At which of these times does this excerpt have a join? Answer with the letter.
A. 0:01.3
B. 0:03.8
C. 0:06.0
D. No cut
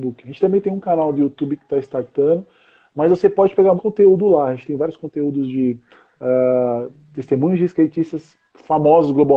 B